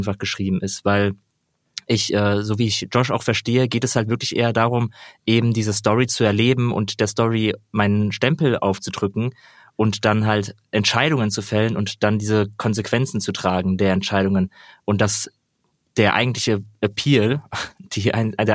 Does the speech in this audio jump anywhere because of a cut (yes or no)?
no